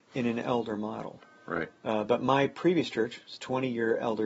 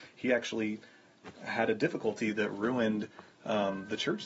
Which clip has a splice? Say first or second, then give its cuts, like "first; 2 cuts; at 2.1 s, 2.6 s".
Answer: first; 1 cut; at 1.8 s